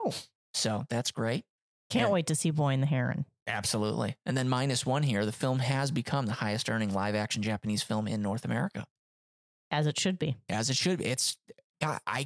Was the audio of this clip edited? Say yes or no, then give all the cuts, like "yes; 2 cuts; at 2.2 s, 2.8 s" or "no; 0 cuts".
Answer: no; 0 cuts